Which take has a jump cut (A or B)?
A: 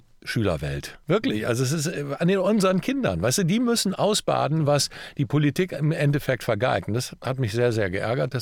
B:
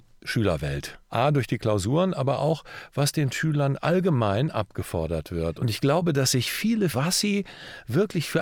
B